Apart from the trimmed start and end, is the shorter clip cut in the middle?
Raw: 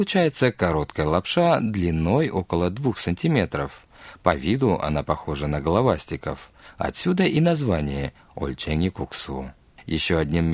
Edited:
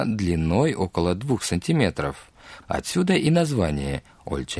yes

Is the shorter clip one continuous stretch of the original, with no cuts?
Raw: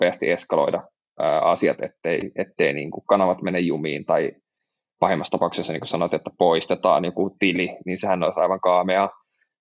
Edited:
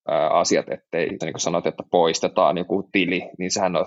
no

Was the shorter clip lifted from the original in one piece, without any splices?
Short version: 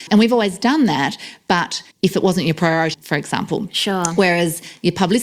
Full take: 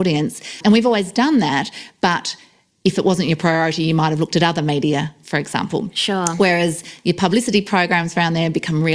no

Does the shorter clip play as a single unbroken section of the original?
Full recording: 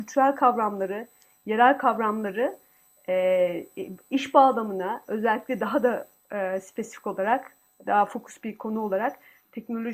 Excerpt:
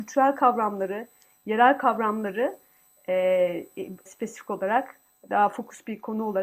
no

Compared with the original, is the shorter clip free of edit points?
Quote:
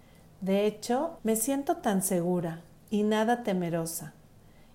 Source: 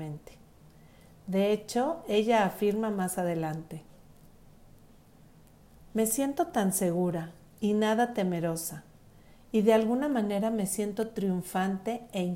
no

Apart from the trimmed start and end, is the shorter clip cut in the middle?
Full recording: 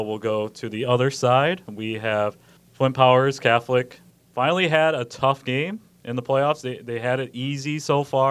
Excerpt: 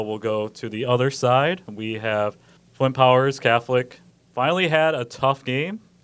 no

